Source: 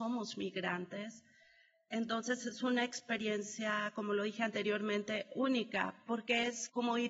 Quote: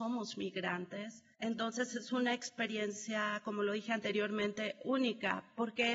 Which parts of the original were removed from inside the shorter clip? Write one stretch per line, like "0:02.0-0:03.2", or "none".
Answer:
0:01.3-0:01.8